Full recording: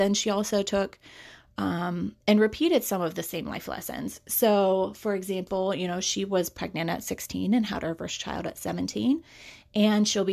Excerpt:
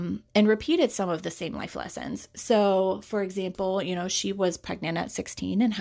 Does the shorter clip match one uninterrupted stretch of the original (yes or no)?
yes